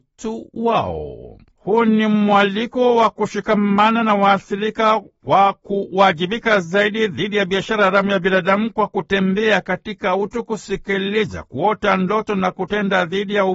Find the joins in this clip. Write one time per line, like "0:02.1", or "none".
0:01.5